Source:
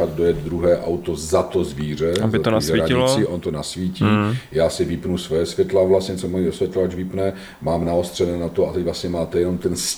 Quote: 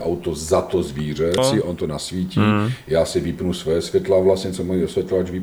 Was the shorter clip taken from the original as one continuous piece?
no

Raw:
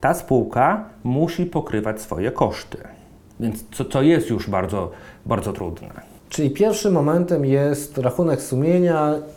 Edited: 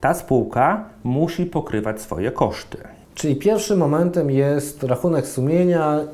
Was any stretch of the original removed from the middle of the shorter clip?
yes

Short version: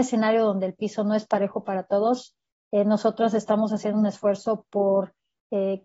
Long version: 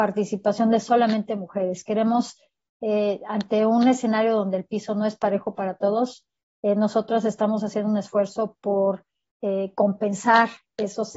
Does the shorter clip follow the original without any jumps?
yes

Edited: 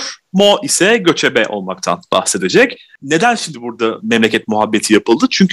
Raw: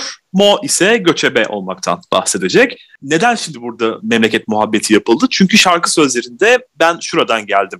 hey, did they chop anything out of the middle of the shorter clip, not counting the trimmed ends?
no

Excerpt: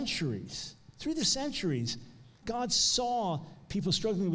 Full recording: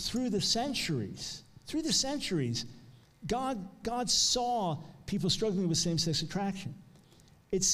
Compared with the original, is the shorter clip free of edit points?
no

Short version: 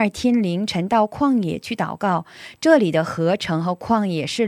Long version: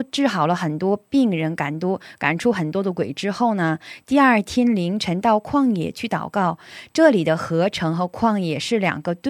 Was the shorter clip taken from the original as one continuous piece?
yes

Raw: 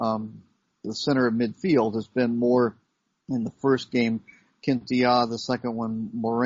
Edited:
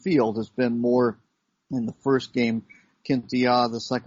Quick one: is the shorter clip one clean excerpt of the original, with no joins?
yes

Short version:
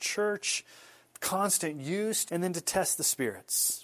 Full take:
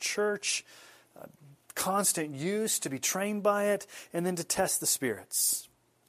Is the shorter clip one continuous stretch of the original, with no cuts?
no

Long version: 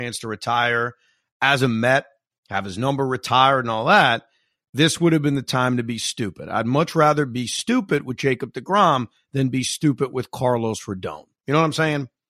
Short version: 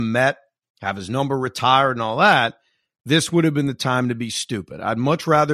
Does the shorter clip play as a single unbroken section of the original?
yes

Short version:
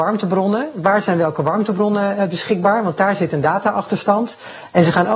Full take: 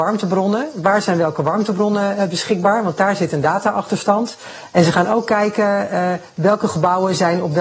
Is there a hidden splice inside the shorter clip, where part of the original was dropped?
no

